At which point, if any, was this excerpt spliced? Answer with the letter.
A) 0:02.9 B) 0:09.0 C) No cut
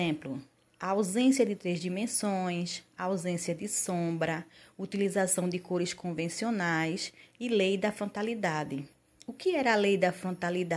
C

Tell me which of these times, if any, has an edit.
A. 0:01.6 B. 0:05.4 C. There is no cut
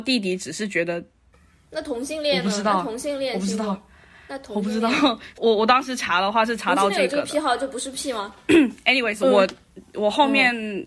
B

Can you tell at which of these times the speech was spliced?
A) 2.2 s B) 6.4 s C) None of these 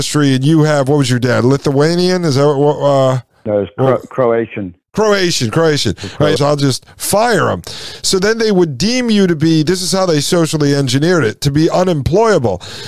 B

